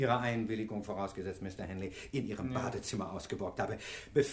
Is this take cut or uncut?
uncut